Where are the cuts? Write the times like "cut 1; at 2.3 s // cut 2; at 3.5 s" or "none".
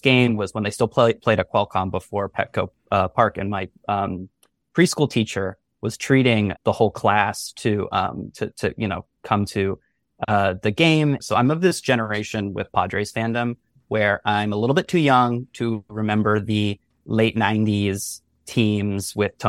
cut 1; at 11.2 s